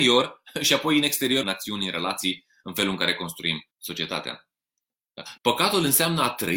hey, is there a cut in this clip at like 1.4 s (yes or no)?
yes